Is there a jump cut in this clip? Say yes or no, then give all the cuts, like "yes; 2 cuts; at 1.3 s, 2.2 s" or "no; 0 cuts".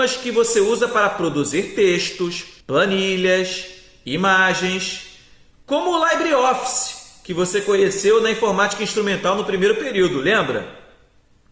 yes; 1 cut; at 2.6 s